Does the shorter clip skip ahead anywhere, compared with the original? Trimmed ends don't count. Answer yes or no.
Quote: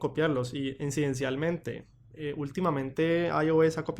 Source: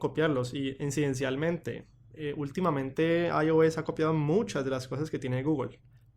no